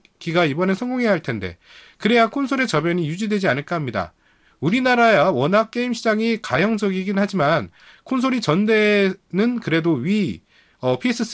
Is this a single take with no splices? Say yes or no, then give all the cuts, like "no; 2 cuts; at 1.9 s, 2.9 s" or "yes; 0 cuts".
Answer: yes; 0 cuts